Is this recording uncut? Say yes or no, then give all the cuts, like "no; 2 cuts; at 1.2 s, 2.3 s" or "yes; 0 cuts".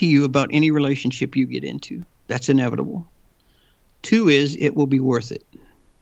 no; 1 cut; at 2.2 s